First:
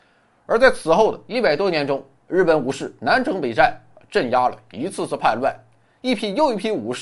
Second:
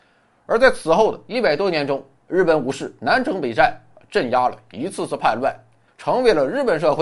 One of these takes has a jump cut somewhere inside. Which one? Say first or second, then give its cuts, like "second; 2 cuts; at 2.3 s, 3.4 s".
second; 1 cut; at 5.9 s